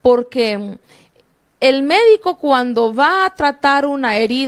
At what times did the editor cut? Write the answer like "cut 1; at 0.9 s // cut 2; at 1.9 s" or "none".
none

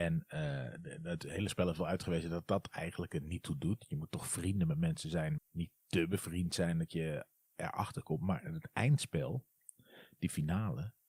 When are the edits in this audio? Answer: cut 1; at 5.4 s

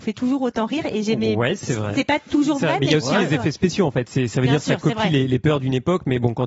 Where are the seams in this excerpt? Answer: none

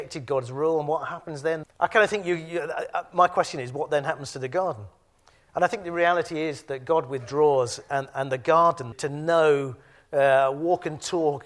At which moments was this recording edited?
cut 1; at 1.6 s // cut 2; at 8.9 s

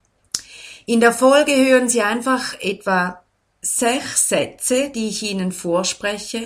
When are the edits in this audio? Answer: none

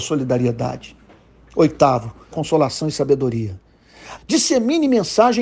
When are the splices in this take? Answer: cut 1; at 2.3 s // cut 2; at 4.2 s

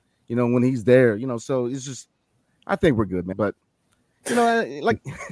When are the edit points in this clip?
cut 1; at 3.3 s

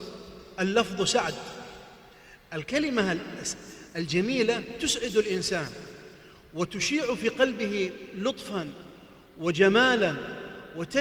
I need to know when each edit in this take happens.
none

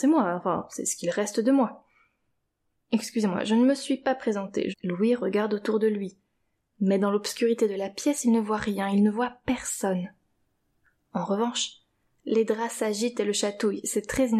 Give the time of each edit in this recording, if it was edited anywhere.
cut 1; at 4.7 s

